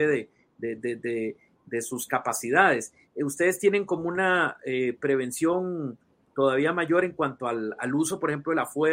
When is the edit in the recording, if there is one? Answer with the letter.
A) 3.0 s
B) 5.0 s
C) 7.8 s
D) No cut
C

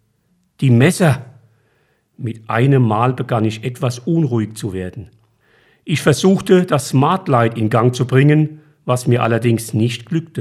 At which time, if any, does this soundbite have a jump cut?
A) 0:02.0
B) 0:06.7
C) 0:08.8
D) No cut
D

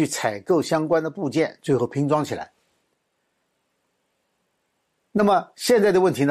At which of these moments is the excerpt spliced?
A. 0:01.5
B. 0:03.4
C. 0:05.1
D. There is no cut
D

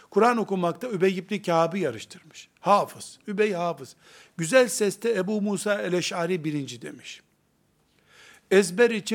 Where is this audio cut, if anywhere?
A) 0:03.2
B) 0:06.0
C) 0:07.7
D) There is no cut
A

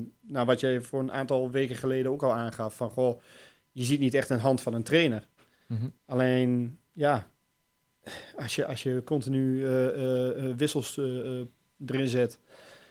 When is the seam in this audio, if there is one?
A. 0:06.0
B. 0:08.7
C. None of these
A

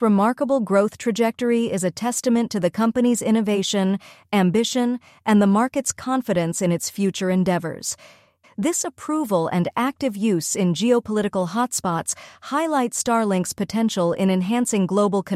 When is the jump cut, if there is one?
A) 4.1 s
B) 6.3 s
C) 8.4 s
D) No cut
C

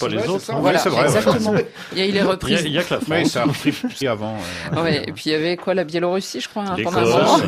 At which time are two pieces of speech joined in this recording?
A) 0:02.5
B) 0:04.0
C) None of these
B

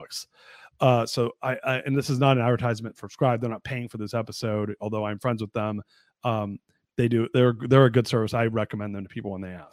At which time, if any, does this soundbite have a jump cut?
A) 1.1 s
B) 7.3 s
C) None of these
C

